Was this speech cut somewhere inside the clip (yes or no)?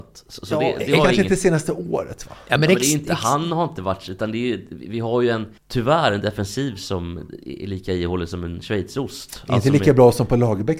yes